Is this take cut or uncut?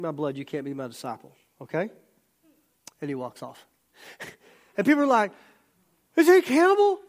uncut